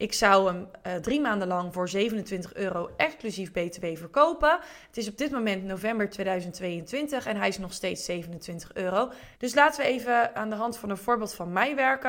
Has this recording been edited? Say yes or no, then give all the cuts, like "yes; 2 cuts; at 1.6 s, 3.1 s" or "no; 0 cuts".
yes; 1 cut; at 9.3 s